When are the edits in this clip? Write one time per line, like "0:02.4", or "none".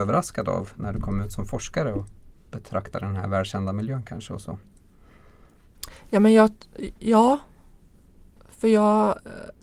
none